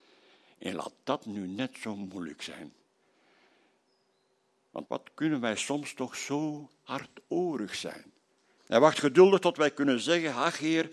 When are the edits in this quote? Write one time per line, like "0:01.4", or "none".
0:04.9
0:08.6